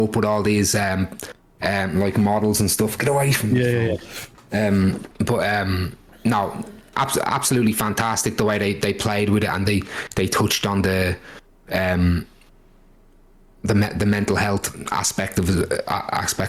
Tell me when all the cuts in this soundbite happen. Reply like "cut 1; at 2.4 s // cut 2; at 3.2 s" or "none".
cut 1; at 5.1 s

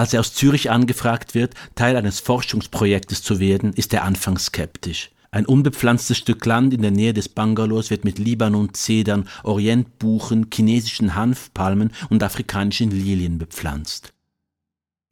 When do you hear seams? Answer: cut 1; at 5.2 s

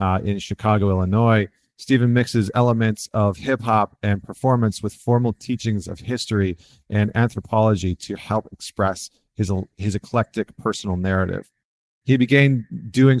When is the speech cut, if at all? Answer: none

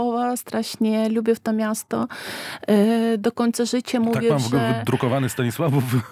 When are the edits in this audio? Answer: none

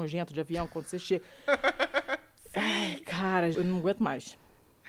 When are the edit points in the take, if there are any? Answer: cut 1; at 3.5 s

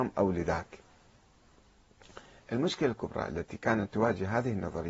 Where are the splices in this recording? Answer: none

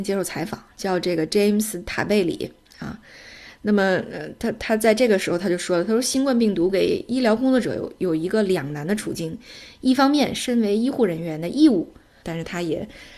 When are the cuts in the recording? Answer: cut 1; at 12.2 s

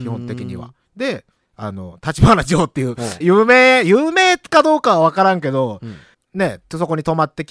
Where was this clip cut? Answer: cut 1; at 3.2 s // cut 2; at 6.1 s

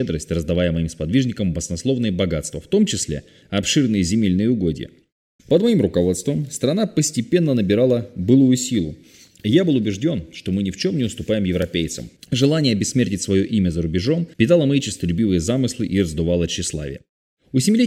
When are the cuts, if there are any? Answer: cut 1; at 5.4 s // cut 2; at 12.2 s // cut 3; at 14.3 s

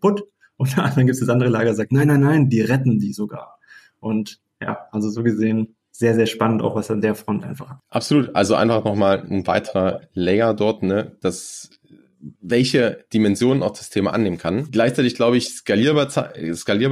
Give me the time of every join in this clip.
cut 1; at 12.3 s // cut 2; at 14.7 s

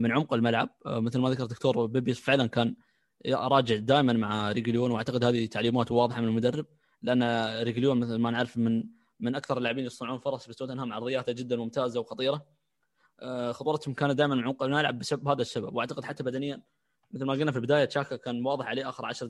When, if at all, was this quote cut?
none

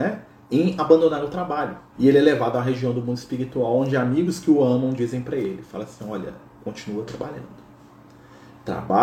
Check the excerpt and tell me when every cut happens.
cut 1; at 2.0 s

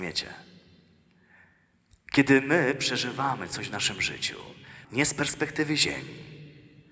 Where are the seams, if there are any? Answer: cut 1; at 4.8 s

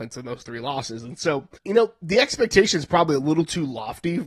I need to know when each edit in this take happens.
cut 1; at 1.6 s

